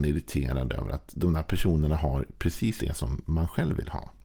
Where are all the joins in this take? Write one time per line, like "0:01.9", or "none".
0:02.8